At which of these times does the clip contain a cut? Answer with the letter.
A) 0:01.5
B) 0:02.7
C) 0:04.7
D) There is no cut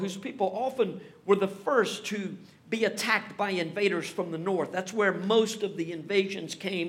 D